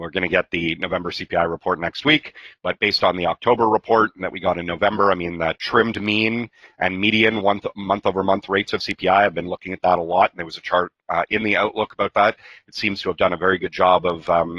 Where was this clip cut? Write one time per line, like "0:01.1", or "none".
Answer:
none